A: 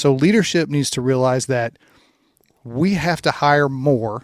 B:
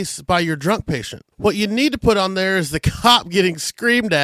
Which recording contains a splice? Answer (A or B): B